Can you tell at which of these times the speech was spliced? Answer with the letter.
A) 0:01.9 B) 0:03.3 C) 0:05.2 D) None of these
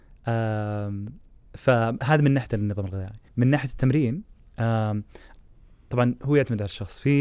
B